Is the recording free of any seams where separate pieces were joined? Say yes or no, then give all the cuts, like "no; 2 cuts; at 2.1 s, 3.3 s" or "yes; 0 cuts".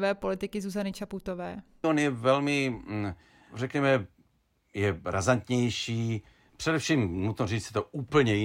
no; 2 cuts; at 1.8 s, 6.5 s